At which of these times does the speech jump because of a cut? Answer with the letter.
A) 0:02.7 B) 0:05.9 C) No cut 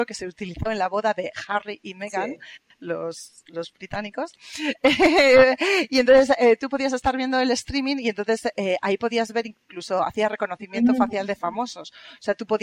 C